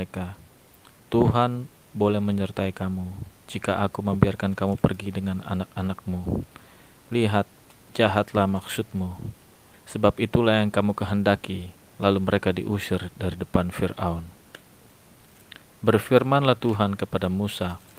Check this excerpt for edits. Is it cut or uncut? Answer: cut